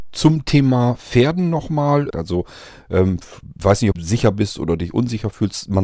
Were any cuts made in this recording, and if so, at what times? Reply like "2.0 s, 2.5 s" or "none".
2.1 s, 3.9 s